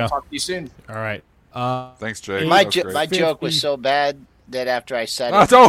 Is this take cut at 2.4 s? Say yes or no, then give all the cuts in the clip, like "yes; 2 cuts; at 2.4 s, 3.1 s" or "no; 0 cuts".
no; 0 cuts